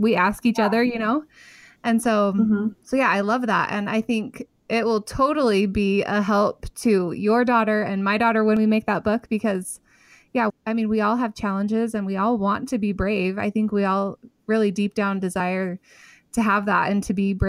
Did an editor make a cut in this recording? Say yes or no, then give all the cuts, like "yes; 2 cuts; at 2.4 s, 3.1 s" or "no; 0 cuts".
yes; 1 cut; at 10.5 s